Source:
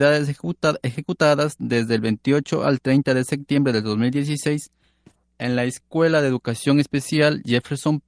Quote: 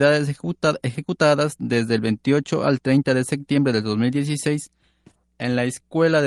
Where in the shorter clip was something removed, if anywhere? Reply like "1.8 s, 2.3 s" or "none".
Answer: none